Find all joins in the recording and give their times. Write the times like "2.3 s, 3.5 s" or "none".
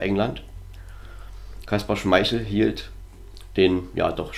1.6 s

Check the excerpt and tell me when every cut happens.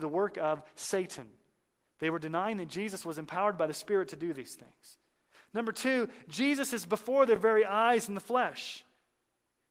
none

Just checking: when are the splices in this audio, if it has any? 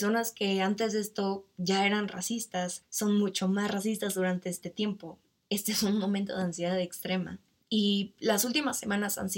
5.4 s, 7.6 s

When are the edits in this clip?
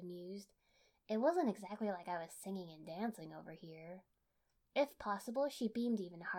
none

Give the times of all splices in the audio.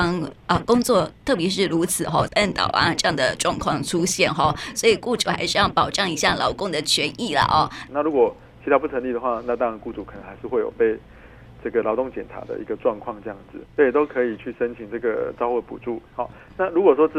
2.3 s, 7.9 s, 13.7 s

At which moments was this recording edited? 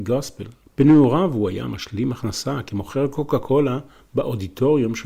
none

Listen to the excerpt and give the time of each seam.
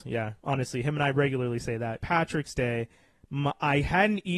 2.0 s

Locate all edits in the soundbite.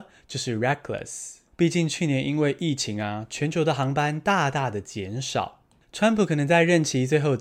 1.5 s, 5.8 s

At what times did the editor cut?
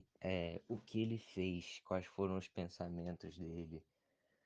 none

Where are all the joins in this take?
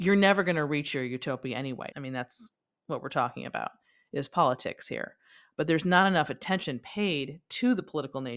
1.9 s

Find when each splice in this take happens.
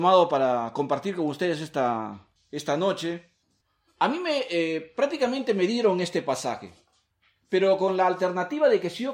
none

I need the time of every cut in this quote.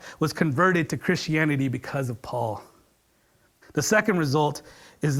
3.6 s

